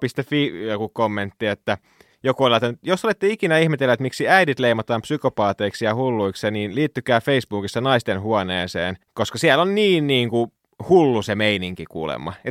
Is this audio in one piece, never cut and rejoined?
no; 1 cut; at 9.0 s

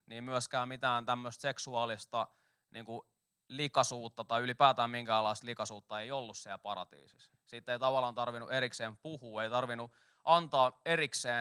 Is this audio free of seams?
yes; 0 cuts

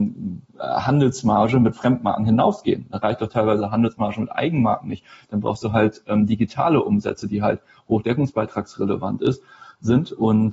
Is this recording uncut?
yes; 0 cuts

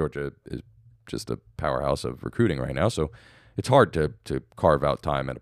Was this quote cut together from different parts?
no; 0 cuts

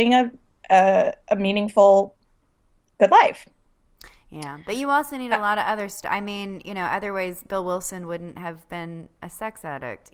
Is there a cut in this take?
no; 0 cuts

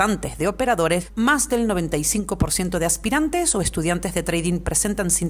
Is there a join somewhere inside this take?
yes; 1 cut; at 1.1 s

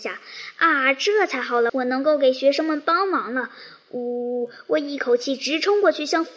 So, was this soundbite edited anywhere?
yes; 1 cut; at 1.7 s

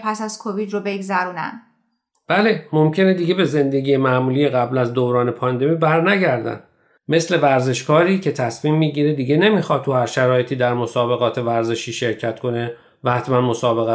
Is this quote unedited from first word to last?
yes; 0 cuts

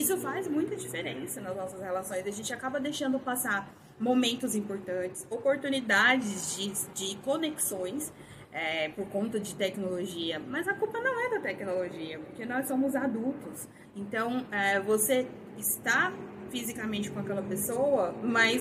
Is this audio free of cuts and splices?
no; 2 cuts; at 8.4 s, 13.8 s

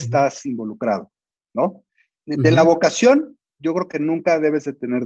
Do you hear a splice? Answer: no; 0 cuts

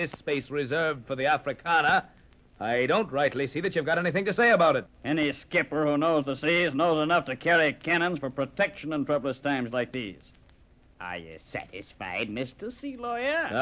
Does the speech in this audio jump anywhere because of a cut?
yes; 1 cut; at 4.8 s

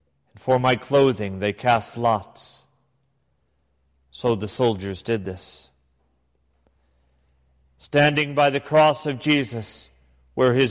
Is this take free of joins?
yes; 0 cuts

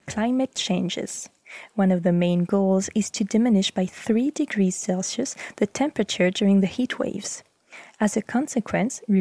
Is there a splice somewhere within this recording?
no; 0 cuts

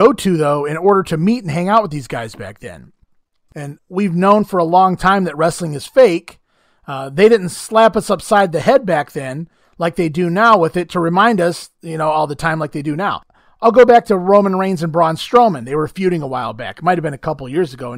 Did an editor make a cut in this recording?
yes; 1 cut; at 3.8 s

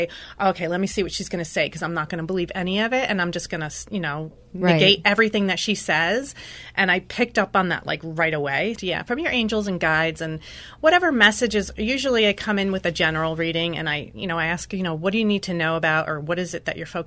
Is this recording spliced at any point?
yes; 1 cut; at 8.8 s

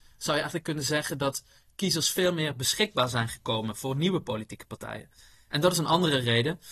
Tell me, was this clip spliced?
no; 0 cuts

